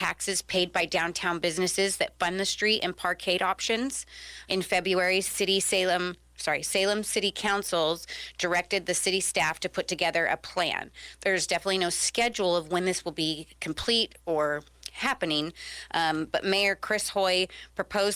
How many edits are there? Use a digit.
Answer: 1